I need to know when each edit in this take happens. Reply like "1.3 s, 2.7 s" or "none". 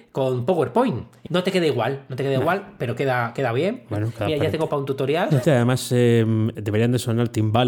1.3 s, 5.4 s, 6.5 s